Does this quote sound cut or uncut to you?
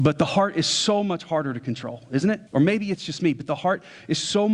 cut